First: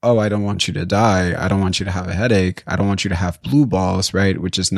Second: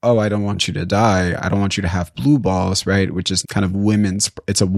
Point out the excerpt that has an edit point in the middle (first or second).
second